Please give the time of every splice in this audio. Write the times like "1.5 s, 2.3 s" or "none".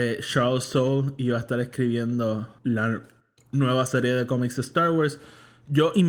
2.6 s